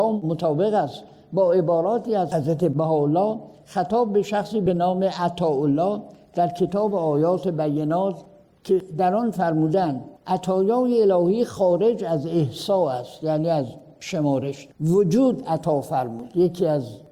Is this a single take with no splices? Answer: no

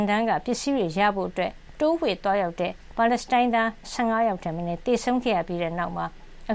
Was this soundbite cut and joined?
yes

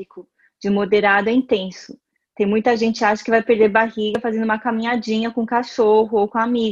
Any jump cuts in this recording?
no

